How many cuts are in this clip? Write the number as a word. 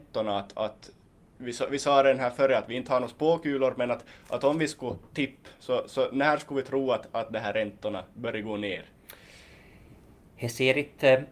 zero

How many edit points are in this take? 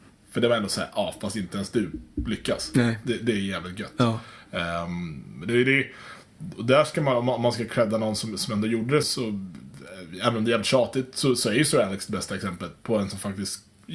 one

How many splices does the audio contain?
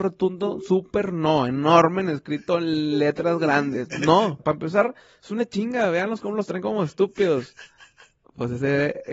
one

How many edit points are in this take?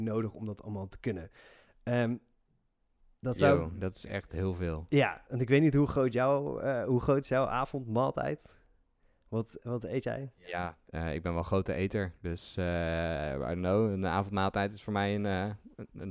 zero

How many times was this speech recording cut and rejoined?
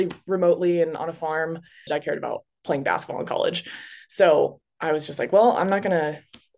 one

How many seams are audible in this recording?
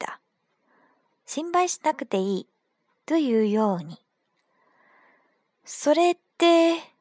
one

